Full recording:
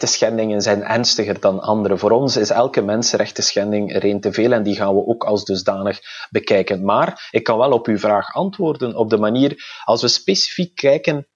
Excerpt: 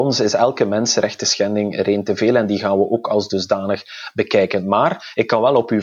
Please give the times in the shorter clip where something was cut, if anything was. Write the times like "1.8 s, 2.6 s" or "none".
none

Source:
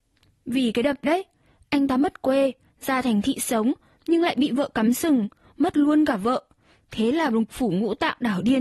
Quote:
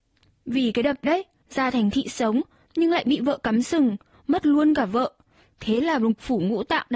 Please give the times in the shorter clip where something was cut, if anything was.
1.4 s

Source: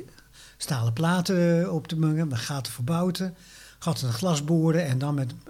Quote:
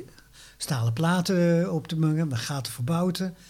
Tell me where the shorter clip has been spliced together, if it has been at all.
none

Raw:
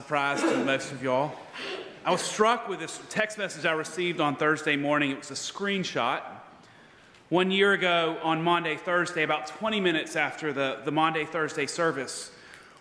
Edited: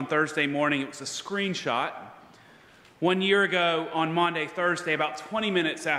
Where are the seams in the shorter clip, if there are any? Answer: none

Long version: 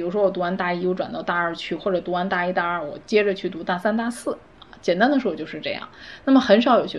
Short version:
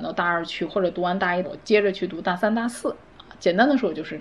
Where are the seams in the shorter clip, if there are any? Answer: 1.4 s

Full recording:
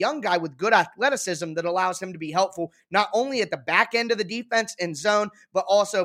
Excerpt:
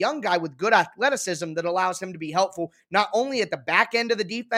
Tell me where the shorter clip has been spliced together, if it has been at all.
none

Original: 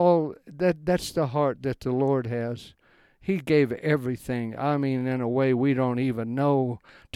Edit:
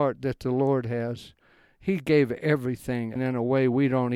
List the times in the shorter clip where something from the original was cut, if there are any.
3.2 s

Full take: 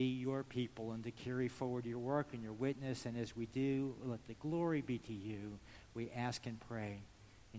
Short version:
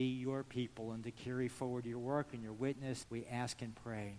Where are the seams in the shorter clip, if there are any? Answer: 3.0 s

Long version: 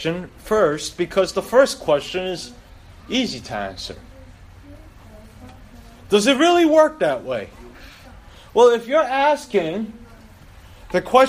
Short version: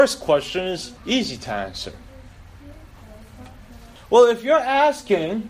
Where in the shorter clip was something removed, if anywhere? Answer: 1.0 s, 4.0 s

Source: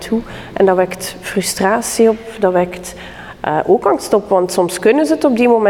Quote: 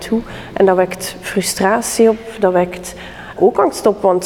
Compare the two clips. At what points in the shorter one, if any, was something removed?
3.4 s

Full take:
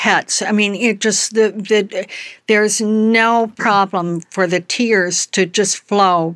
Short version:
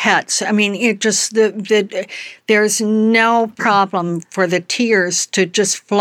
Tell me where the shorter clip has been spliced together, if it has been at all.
none

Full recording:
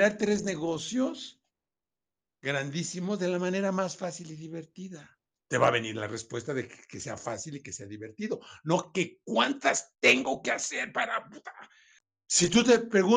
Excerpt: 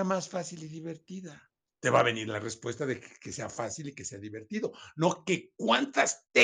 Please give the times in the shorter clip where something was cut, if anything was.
none

